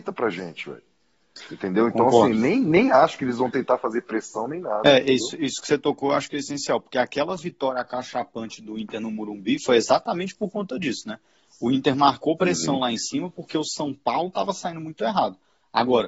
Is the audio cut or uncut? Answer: uncut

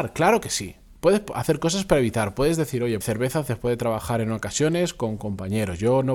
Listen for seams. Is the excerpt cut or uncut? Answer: cut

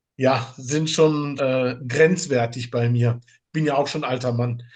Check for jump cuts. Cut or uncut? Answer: cut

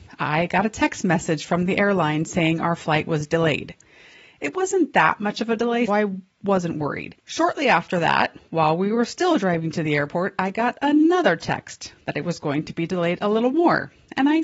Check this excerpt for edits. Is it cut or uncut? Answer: cut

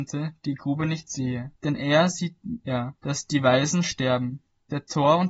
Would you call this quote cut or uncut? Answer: cut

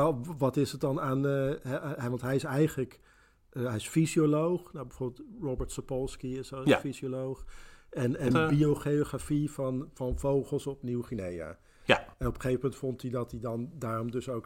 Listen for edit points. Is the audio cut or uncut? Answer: cut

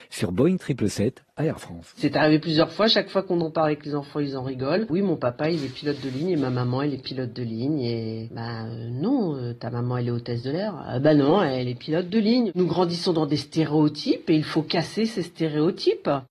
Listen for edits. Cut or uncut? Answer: uncut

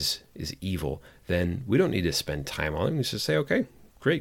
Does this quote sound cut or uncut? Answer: uncut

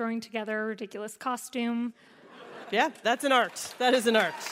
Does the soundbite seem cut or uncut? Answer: cut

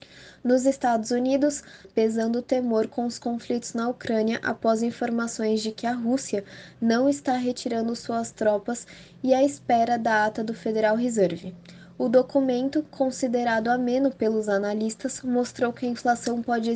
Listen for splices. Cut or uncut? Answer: cut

